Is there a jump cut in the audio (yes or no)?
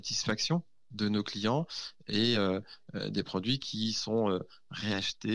no